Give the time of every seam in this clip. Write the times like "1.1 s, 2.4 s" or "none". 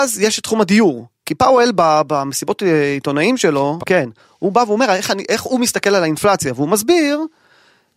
1.2 s, 3.8 s